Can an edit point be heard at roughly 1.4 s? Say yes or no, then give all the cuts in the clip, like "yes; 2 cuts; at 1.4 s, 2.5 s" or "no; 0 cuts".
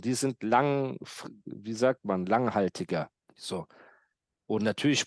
no; 1 cut; at 3.2 s